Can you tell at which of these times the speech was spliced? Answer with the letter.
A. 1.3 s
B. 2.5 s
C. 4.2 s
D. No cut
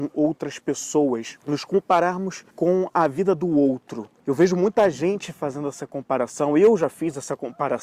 B